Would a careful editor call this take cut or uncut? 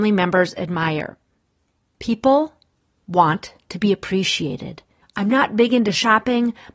cut